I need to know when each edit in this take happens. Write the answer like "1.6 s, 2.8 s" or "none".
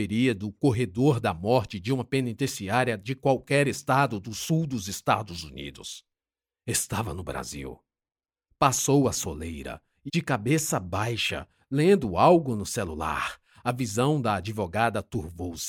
10.1 s